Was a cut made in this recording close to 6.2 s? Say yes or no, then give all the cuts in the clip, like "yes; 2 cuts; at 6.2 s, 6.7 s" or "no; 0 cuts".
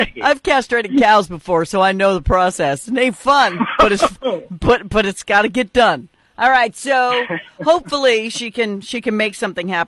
no; 0 cuts